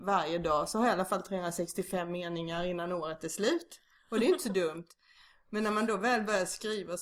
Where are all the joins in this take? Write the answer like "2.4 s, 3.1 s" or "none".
none